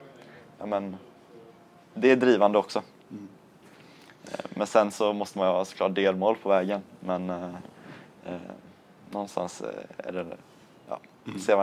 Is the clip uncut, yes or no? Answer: yes